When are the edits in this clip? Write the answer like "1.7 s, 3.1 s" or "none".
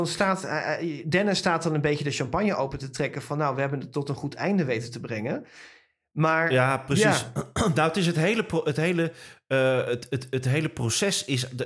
none